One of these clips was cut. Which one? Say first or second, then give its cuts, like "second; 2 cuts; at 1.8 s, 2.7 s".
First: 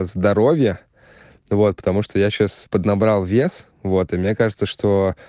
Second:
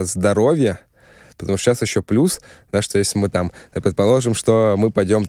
second; 1 cut; at 1.3 s